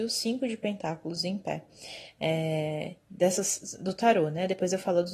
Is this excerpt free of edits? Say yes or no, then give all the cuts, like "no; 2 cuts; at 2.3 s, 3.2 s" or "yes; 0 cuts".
yes; 0 cuts